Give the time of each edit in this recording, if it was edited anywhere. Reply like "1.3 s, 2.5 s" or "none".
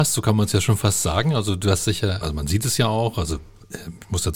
2.2 s